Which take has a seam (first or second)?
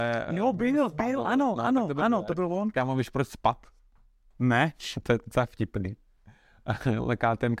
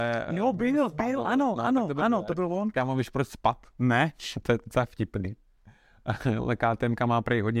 second